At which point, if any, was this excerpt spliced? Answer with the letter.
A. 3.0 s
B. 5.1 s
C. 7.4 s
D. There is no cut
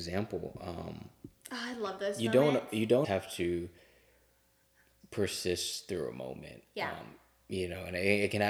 A